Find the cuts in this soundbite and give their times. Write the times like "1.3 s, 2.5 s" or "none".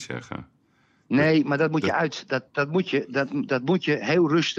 none

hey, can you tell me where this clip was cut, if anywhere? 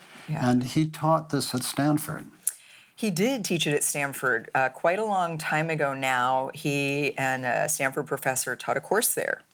none

